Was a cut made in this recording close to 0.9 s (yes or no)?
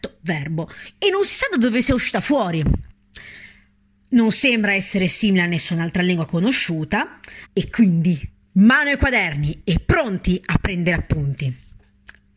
yes